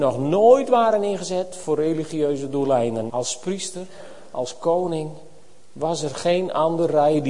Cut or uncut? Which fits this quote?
cut